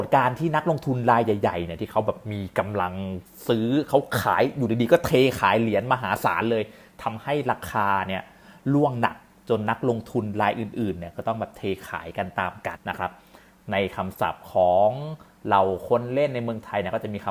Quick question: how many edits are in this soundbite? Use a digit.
1